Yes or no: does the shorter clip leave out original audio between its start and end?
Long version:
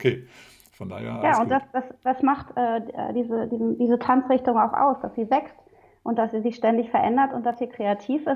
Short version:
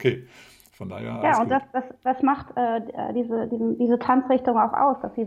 no